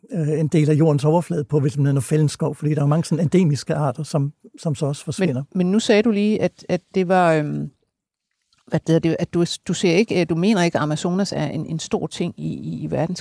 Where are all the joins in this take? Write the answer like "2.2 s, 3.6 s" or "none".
none